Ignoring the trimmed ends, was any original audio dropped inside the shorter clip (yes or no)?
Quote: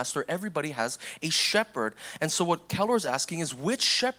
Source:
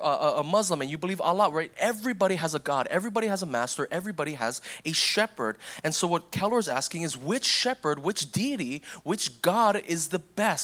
no